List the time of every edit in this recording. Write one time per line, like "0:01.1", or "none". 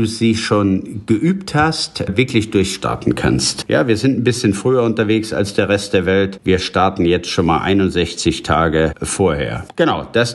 none

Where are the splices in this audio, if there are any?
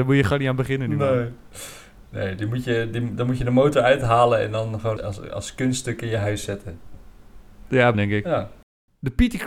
0:05.0
0:07.9

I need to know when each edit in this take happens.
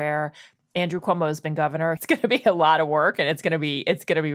0:02.0

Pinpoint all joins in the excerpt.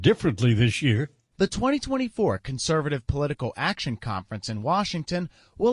none

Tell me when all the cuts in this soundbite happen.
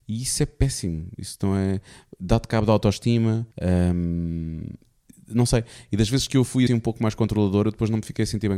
0:03.5
0:06.7

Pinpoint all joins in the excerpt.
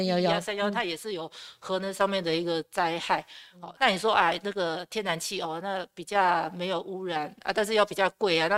0:03.8

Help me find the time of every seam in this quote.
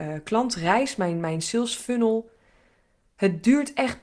none

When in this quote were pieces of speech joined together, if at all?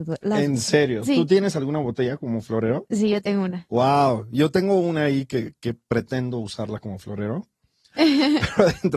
0:07.9

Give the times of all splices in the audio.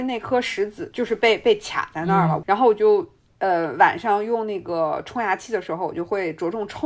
0:00.9
0:02.4

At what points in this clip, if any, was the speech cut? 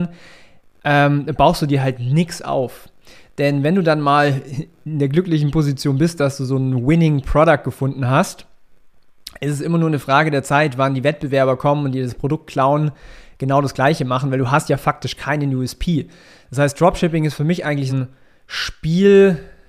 0:17.9

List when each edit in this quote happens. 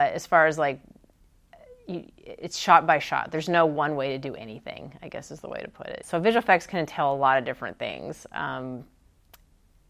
0:06.0

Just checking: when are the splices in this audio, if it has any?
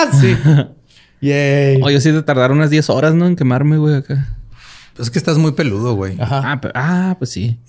none

